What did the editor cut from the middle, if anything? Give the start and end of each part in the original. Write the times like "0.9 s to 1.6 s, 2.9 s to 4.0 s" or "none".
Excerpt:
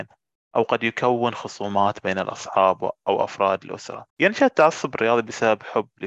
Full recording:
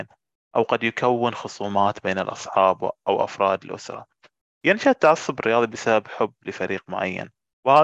4.1 s to 4.5 s